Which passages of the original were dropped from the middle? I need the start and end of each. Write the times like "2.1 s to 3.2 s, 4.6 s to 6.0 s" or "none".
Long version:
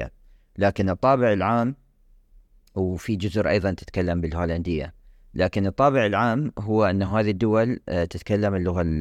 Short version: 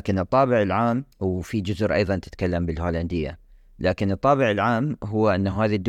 1.8 s to 2.7 s